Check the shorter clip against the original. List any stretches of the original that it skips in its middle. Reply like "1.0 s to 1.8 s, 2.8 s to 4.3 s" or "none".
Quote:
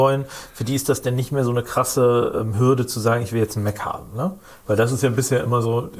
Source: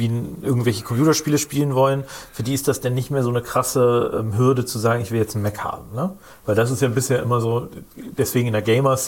none